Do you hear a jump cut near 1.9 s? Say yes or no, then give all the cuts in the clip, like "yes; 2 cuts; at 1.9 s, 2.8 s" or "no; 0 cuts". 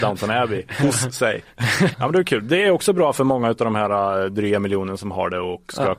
yes; 1 cut; at 1.9 s